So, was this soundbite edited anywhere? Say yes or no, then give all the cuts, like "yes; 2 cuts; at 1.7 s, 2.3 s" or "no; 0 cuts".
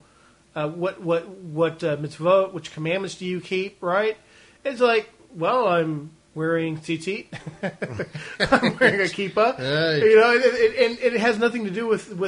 no; 0 cuts